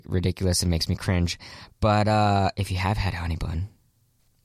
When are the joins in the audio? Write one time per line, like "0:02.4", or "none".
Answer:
none